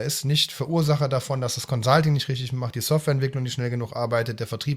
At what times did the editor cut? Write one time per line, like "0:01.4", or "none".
none